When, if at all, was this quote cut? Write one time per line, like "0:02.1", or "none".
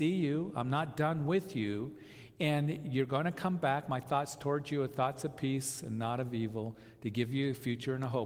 none